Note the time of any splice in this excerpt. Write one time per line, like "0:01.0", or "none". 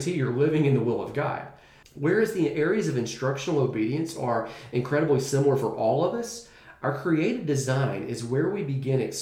0:01.8